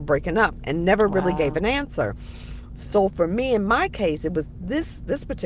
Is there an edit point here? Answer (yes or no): no